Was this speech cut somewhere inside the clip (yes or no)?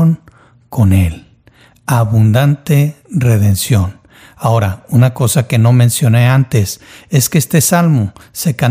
no